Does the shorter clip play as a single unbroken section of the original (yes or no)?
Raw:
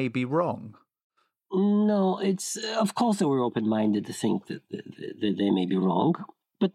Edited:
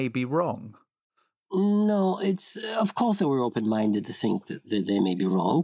no